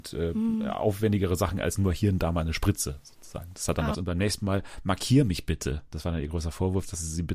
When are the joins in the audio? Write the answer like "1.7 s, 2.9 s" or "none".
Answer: 3.9 s